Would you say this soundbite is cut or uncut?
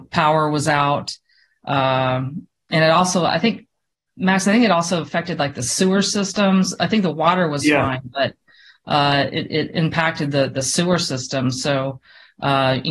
uncut